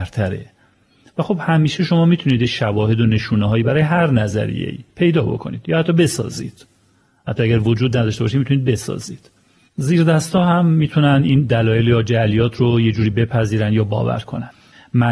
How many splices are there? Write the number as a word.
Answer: zero